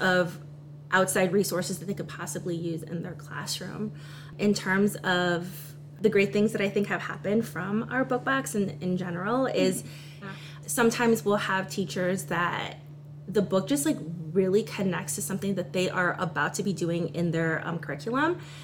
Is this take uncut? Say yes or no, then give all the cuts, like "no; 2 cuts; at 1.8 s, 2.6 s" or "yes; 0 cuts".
no; 1 cut; at 10.2 s